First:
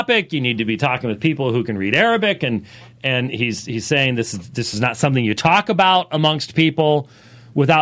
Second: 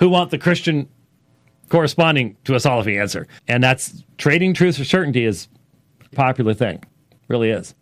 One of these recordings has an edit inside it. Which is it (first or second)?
second